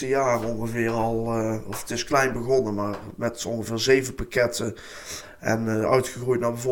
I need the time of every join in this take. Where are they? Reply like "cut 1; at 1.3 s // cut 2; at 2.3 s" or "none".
none